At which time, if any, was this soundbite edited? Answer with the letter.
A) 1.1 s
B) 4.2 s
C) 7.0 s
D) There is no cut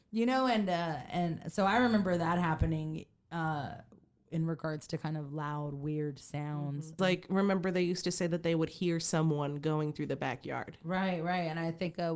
C